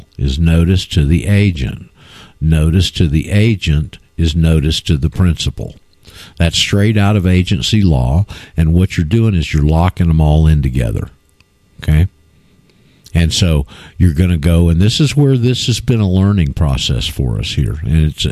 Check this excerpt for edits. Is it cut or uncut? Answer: uncut